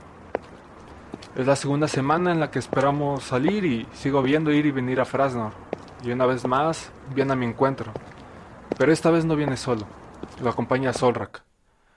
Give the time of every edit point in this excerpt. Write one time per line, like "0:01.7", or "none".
none